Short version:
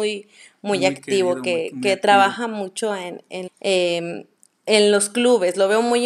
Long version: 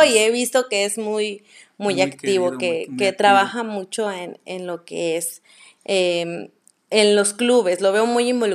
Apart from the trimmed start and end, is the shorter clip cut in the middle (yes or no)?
yes